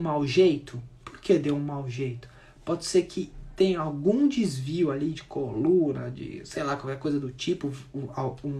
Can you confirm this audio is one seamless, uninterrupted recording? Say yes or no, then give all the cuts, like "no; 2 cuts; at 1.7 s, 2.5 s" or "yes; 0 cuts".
yes; 0 cuts